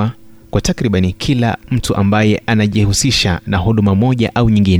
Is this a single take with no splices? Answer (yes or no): yes